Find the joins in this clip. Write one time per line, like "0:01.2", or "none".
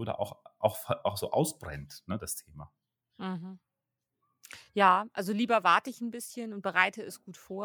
none